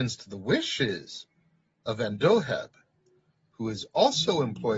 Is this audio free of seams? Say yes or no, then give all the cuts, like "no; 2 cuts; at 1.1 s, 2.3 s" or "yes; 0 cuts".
yes; 0 cuts